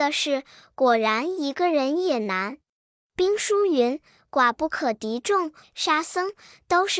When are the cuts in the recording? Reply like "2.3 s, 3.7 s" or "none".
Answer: 5.6 s

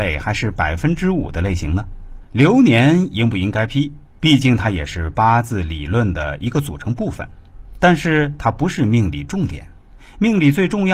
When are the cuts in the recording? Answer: 2.2 s, 4.2 s

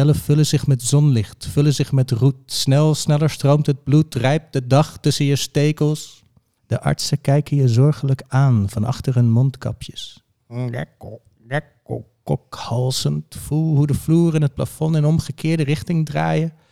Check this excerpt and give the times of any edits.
6.6 s, 10.4 s

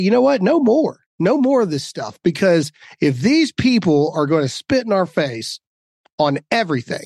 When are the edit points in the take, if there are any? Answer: none

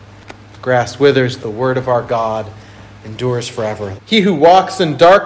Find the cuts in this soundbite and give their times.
1.4 s, 3.9 s

